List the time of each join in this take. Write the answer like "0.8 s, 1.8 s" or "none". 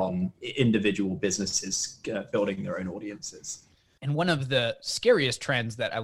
4.0 s